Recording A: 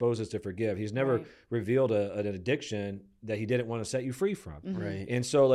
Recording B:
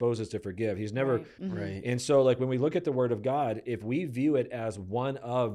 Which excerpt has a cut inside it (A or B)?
B